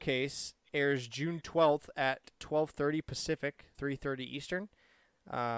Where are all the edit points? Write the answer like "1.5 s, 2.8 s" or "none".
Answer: 3.7 s

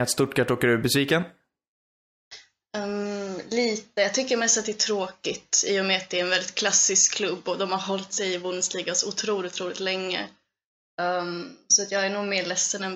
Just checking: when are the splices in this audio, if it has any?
none

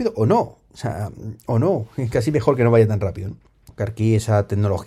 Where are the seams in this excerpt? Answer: 3.7 s

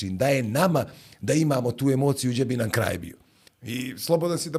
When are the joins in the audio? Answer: 3.5 s

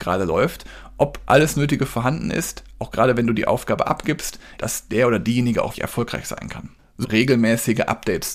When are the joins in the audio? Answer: 4.6 s, 5.7 s, 7.0 s

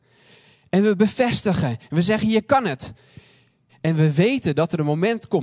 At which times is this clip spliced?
3.7 s

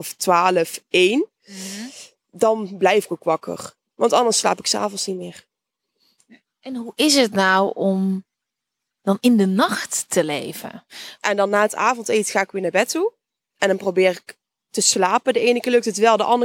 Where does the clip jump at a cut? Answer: 11.2 s

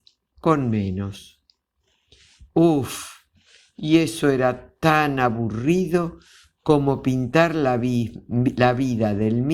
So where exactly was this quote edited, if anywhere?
none

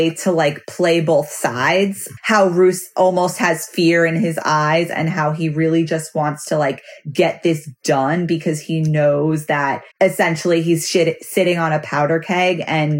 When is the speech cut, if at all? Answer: 2.2 s, 9.9 s

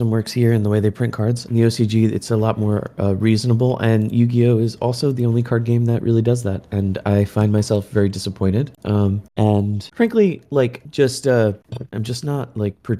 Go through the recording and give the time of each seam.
1.5 s, 11.9 s

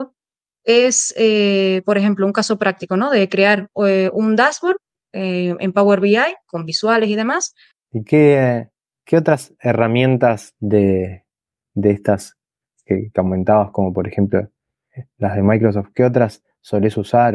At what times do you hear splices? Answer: 7.9 s

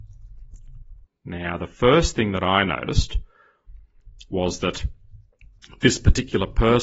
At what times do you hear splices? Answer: 1.1 s

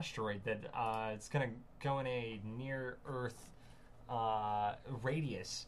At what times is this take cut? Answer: none

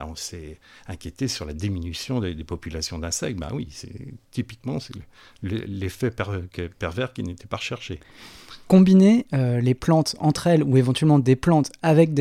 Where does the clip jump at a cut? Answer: none

